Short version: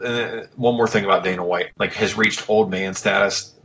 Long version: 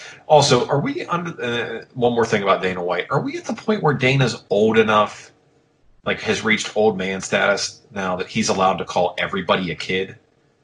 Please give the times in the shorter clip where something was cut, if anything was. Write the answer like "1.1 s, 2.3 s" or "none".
1.7 s